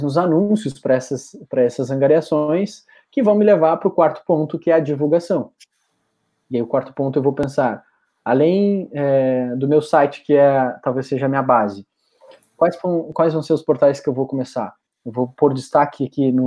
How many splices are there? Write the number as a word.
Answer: one